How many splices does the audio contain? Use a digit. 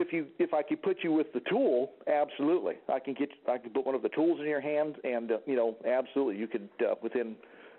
0